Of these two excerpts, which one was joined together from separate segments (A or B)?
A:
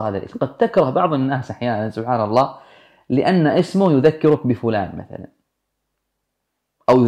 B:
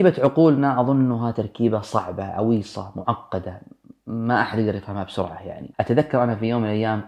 B